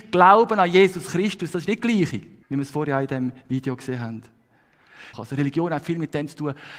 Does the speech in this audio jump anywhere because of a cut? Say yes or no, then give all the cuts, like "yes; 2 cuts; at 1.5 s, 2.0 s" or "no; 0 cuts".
yes; 2 cuts; at 2.4 s, 5.1 s